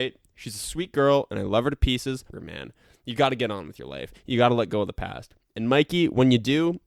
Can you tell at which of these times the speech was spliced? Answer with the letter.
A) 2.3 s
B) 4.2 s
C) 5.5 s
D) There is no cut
A